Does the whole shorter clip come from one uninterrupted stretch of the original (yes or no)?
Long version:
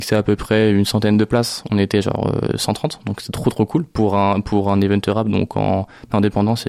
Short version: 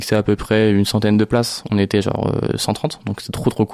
yes